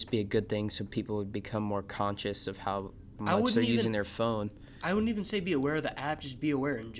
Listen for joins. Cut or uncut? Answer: uncut